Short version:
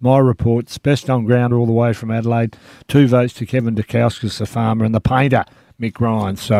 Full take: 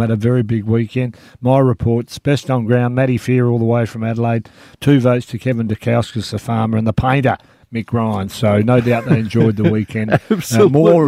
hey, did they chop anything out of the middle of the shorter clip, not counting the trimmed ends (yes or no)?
yes